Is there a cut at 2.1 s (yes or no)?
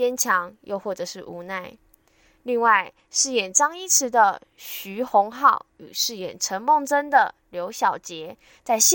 no